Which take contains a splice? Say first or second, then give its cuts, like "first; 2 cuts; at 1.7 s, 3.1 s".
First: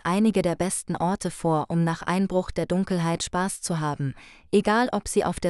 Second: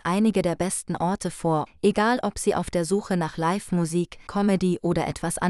second; 2 cuts; at 1.7 s, 4.3 s